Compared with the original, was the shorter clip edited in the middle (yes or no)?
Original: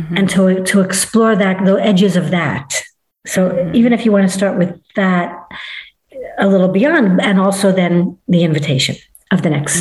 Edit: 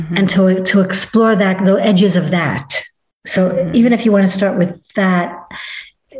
no